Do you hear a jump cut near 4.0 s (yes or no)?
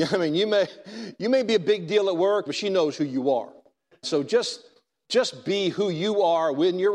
yes